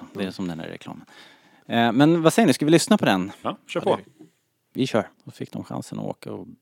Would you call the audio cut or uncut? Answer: cut